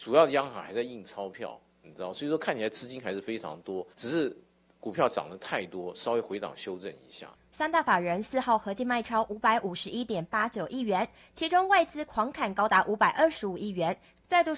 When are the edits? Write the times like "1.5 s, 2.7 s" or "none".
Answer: 3.9 s